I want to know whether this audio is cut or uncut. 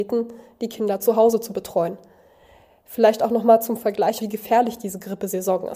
cut